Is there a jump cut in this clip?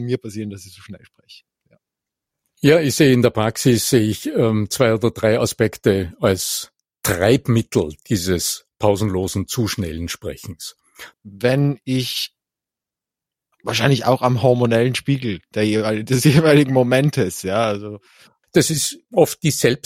yes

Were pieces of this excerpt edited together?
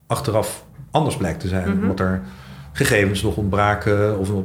no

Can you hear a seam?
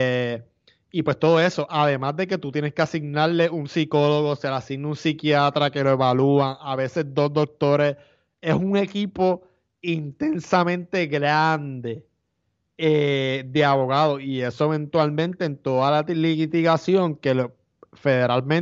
no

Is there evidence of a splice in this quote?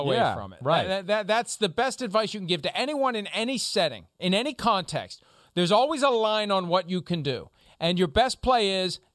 no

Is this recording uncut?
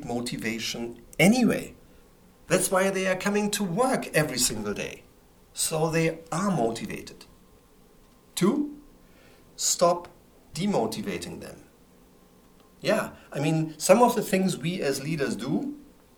yes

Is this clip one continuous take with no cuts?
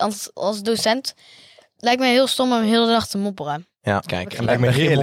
no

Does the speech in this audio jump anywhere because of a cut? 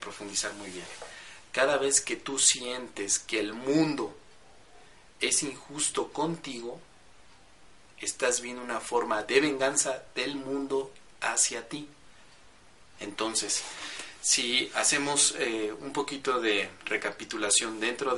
yes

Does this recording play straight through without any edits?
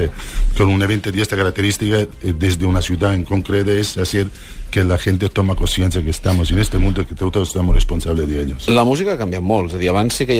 yes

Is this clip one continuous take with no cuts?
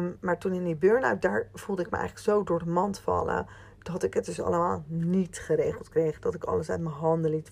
yes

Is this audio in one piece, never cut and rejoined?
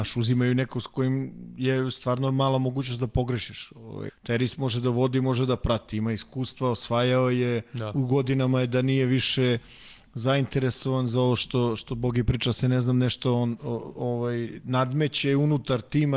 no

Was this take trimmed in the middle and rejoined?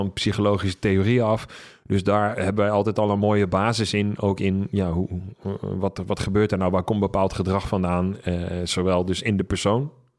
no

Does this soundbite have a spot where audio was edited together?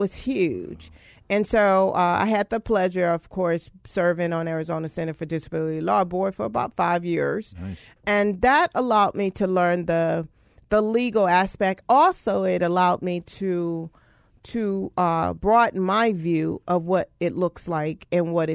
no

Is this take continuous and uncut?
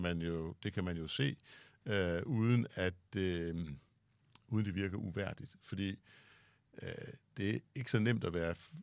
yes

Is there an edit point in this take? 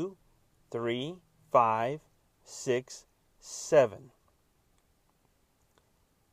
yes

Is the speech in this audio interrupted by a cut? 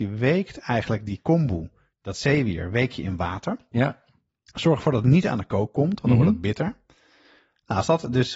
no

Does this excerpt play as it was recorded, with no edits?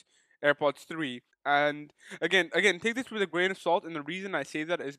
no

